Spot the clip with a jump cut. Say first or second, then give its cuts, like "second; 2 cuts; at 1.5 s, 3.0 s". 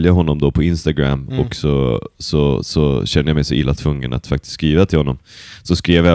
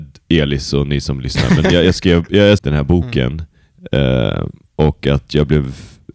second; 1 cut; at 2.6 s